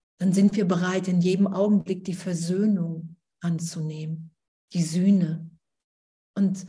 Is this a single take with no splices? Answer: yes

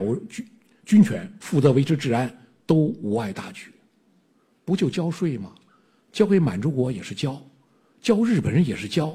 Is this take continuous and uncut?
yes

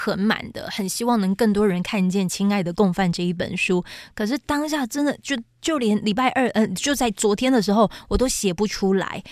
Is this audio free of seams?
yes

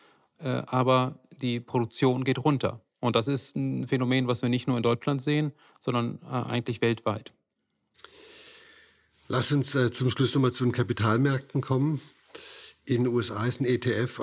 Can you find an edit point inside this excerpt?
no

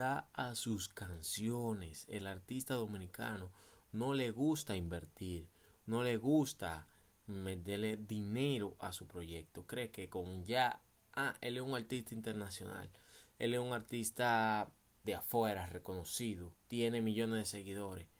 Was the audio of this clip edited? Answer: yes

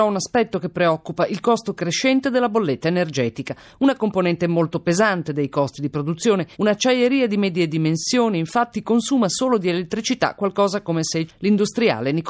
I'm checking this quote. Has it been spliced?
yes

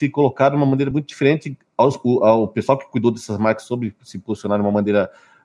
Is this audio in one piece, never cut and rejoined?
yes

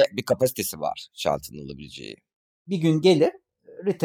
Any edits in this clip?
yes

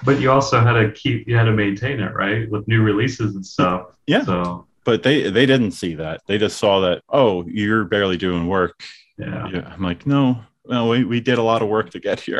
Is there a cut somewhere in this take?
no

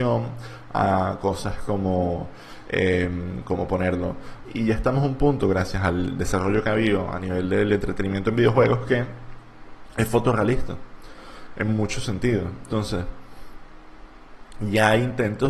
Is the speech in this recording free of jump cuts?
no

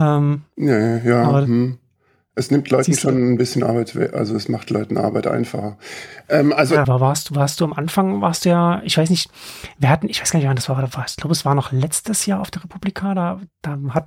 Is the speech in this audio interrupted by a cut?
yes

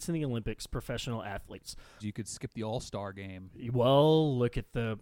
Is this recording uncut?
no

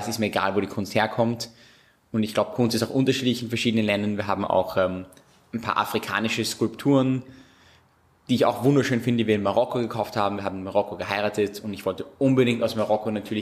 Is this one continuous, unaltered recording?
yes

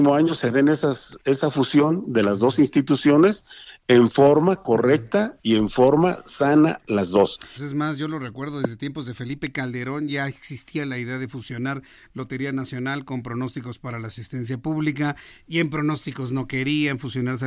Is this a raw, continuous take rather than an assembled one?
no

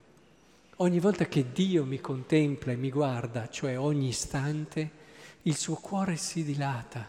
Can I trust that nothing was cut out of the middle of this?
yes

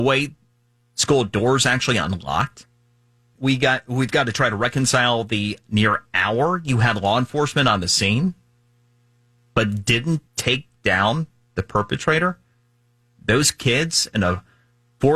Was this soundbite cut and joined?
yes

